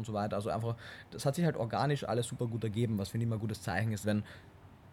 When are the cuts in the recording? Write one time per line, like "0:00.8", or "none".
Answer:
0:04.0